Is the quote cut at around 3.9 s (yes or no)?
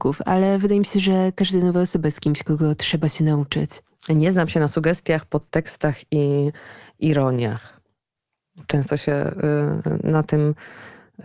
no